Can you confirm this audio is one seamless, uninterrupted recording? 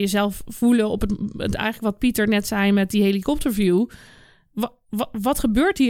yes; 0 cuts

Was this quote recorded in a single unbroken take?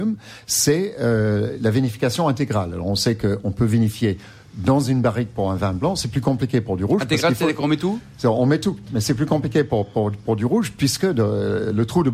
yes; 0 cuts

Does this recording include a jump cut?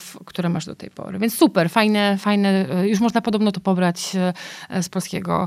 no; 0 cuts

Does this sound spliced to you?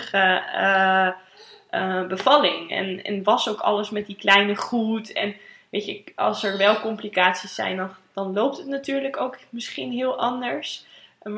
no; 0 cuts

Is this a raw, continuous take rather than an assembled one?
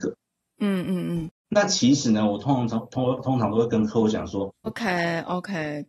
no; 2 cuts; at 1.4 s, 4.7 s

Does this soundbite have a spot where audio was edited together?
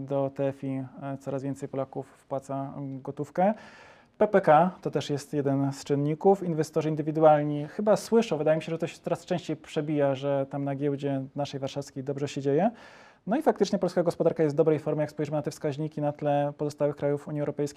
no; 0 cuts

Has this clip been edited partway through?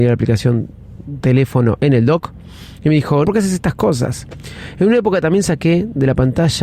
yes; 1 cut; at 3.2 s

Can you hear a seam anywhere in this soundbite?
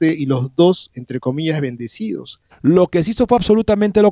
yes; 1 cut; at 2.5 s

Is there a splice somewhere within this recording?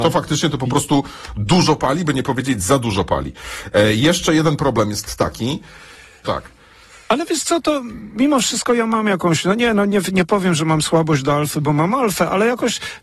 yes; 1 cut; at 6.2 s

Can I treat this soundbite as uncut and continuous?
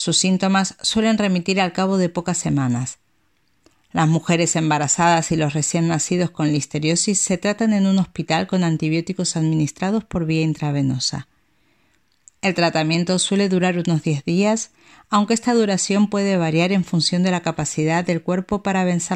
yes; 0 cuts

